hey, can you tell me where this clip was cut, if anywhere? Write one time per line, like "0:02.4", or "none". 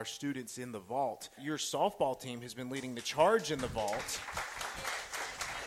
0:01.4

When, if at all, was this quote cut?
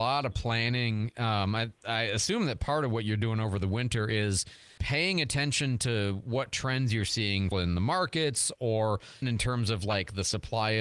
0:04.8
0:07.5
0:09.2

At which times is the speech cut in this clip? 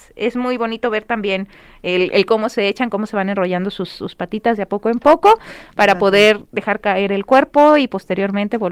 none

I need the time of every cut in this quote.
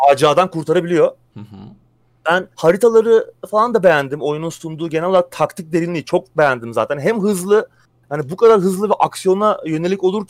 0:02.5

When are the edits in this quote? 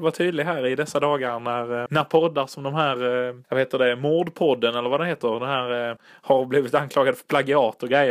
0:01.9
0:03.4
0:06.0

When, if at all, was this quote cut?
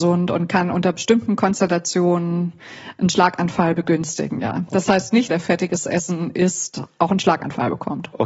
0:05.3

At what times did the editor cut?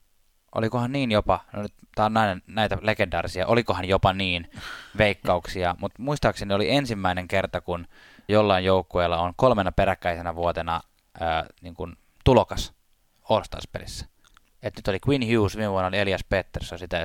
0:08.3

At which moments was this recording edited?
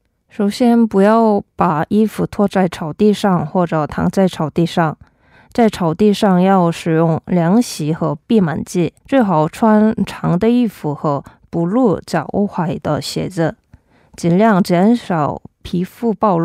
0:09.0

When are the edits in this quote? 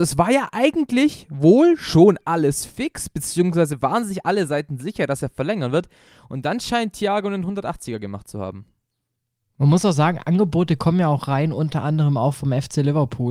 none

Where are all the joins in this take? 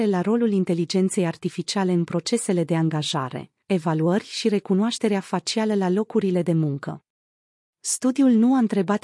0:03.6
0:07.6

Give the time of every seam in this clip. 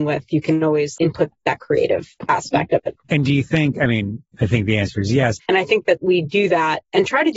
0:01.0
0:05.4

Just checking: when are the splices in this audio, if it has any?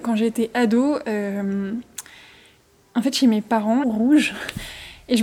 0:03.8

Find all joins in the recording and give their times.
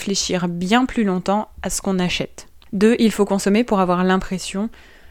0:02.7

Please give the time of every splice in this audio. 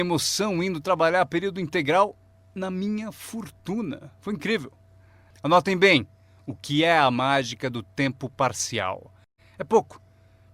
0:09.4

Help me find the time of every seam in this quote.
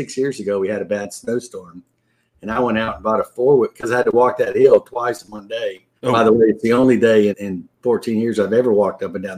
0:06.0
0:07.3

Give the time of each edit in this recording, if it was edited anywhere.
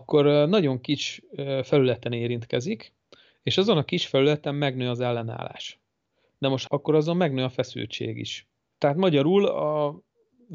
0:06.7
0:08.7

